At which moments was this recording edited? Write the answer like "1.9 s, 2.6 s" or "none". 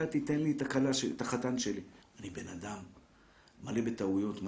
2.0 s